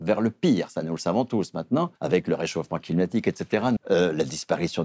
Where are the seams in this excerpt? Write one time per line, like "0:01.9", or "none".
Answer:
0:02.0
0:03.8